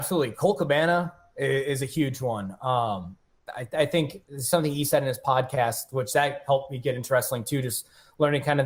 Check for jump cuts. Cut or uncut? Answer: uncut